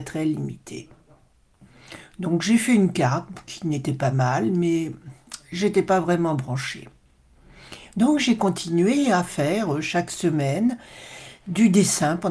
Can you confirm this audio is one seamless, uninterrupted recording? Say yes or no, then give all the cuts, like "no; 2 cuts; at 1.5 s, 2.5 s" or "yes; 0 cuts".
yes; 0 cuts